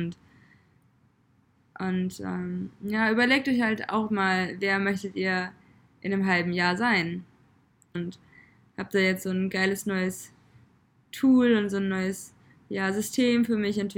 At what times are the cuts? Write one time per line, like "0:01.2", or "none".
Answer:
0:07.9